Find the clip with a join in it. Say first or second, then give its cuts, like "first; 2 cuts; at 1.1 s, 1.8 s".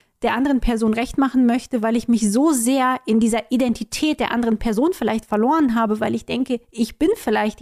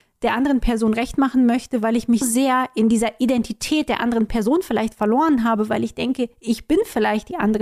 second; 1 cut; at 2.2 s